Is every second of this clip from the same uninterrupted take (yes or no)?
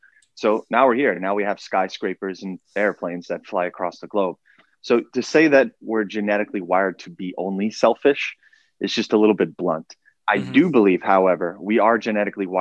yes